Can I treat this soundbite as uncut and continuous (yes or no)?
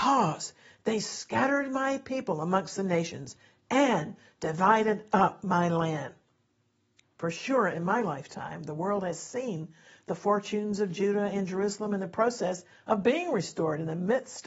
yes